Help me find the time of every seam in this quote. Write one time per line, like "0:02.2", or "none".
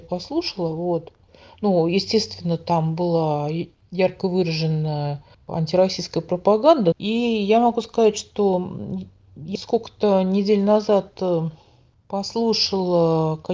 0:06.9
0:09.6